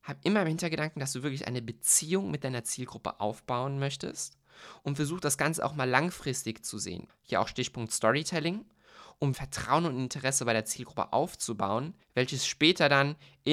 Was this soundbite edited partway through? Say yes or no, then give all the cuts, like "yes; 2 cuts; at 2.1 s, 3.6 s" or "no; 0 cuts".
yes; 3 cuts; at 7.1 s, 9.3 s, 12.0 s